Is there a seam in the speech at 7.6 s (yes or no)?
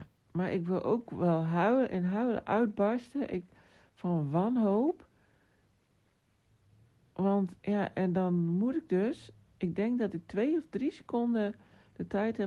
yes